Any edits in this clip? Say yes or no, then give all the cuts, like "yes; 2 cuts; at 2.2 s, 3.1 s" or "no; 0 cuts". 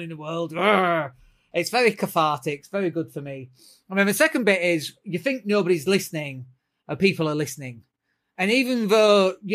no; 0 cuts